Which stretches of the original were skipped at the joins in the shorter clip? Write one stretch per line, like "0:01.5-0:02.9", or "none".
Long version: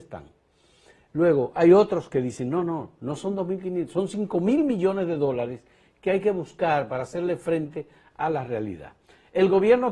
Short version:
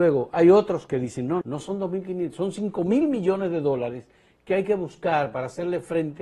0:02.6-0:03.0